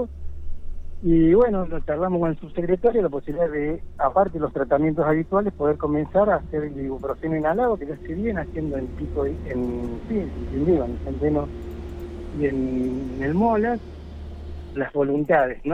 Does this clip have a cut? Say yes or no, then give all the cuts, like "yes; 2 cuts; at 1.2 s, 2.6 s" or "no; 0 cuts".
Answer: yes; 1 cut; at 14.8 s